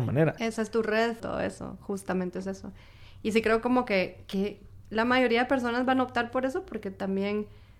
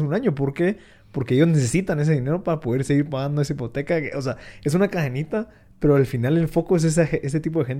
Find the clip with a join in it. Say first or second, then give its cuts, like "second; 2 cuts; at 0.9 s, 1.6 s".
first; 1 cut; at 1.2 s